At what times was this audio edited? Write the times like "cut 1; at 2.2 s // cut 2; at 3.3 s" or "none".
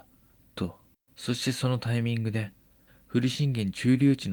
cut 1; at 1.1 s